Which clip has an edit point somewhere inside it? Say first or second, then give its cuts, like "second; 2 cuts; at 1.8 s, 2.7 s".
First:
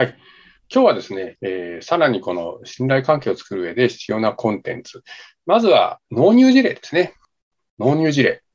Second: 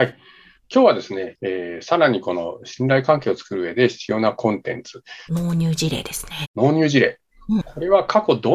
second; 2 cuts; at 5.3 s, 6.4 s